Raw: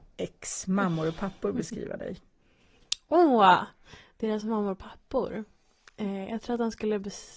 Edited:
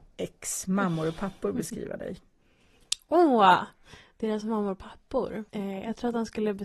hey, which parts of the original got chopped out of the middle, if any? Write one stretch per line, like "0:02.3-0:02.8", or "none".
0:05.5-0:05.9